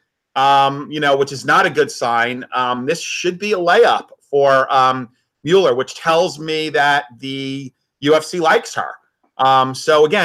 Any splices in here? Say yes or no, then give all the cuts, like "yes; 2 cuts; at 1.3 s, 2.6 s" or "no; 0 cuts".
no; 0 cuts